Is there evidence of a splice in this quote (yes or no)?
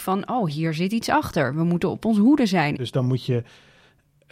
yes